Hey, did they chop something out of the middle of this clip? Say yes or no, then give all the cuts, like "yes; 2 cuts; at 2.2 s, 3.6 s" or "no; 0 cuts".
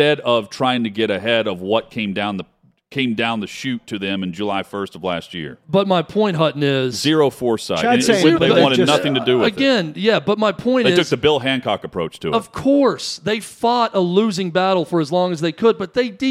yes; 1 cut; at 8.3 s